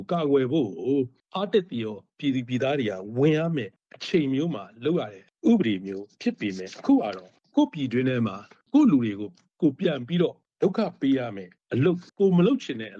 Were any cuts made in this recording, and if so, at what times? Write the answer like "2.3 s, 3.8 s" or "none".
12.1 s